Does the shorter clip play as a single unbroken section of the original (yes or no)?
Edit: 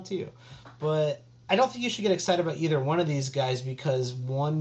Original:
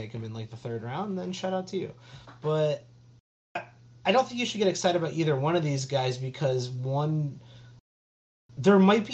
no